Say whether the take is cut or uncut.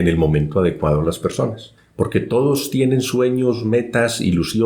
uncut